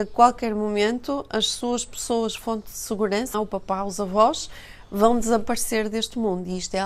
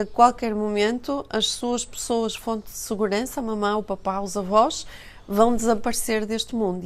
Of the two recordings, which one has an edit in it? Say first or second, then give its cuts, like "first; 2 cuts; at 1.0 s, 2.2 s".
first; 1 cut; at 3.3 s